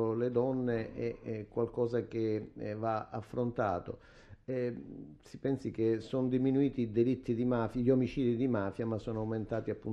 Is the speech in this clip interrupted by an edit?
no; 0 cuts

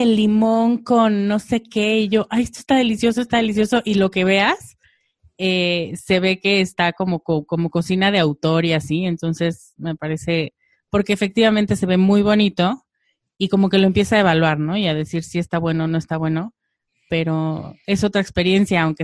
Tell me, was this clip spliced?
no; 0 cuts

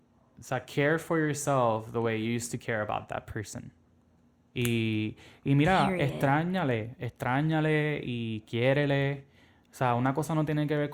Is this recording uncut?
yes; 0 cuts

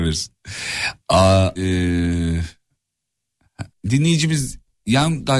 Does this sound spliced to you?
yes; 2 cuts; at 1.5 s, 3.7 s

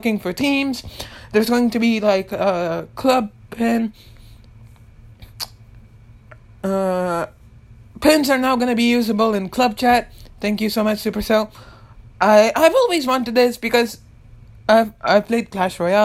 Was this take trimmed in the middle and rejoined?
no; 0 cuts

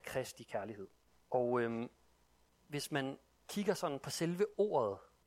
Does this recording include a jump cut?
yes; 1 cut; at 1.2 s

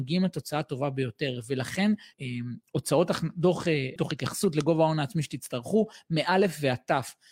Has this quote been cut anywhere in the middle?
yes; 2 cuts; at 2.1 s, 4.0 s

